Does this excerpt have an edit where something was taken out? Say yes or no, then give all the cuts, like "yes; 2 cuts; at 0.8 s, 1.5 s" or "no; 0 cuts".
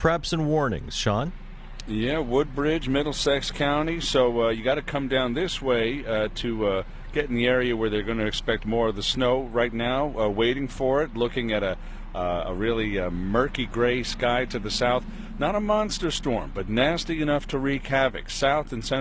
no; 0 cuts